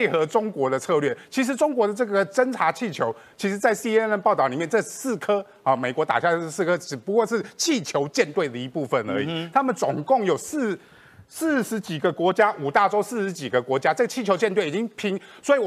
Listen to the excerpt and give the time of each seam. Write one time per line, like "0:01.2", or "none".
none